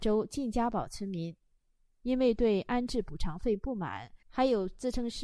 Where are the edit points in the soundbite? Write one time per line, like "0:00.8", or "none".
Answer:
0:04.2